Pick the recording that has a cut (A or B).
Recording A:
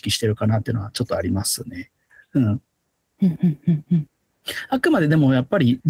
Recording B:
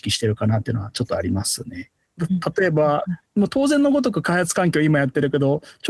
B